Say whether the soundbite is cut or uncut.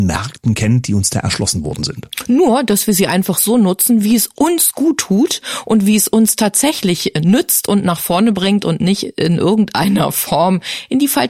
uncut